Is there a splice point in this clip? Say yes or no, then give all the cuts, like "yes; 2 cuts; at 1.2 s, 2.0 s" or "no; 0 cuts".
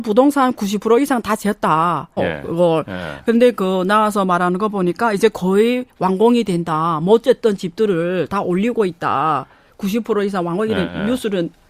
yes; 1 cut; at 2.2 s